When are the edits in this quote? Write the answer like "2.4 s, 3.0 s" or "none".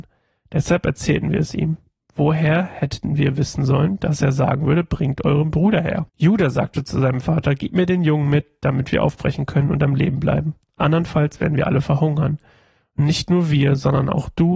6.1 s